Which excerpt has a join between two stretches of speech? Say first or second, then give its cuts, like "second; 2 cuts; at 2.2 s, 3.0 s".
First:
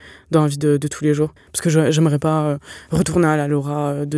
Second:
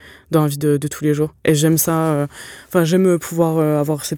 first; 1 cut; at 1.4 s